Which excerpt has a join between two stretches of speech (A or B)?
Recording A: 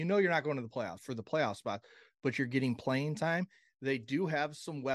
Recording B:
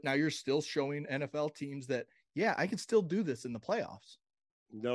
A